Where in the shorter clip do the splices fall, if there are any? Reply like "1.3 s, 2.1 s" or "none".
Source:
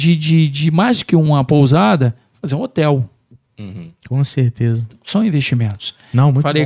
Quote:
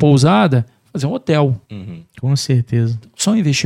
1.6 s